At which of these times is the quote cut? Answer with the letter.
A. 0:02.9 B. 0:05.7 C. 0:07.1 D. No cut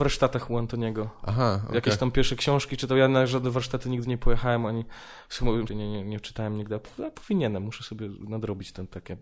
B